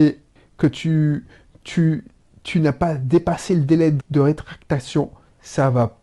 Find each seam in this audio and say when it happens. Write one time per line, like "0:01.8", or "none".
0:04.0